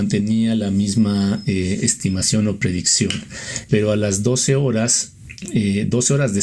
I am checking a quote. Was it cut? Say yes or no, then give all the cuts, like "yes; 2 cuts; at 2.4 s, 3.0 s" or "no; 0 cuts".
yes; 1 cut; at 3.7 s